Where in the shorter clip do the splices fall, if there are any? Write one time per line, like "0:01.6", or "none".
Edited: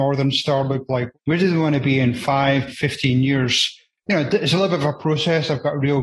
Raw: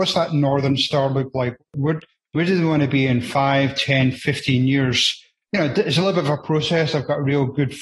0:01.2
0:02.7